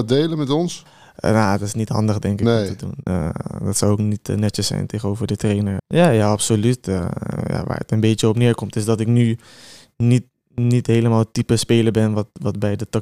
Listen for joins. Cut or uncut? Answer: cut